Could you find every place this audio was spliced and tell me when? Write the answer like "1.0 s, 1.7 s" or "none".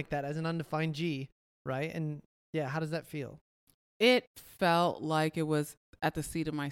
none